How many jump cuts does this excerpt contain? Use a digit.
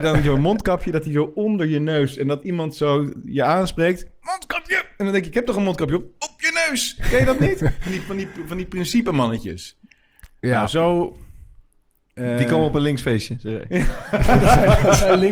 0